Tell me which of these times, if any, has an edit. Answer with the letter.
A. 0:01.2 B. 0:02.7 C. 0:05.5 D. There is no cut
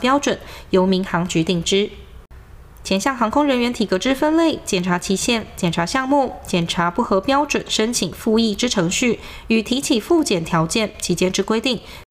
B